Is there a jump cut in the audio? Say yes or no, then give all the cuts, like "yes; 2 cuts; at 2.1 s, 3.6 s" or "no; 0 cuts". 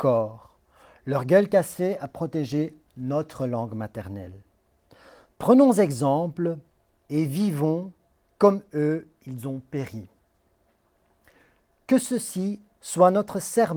no; 0 cuts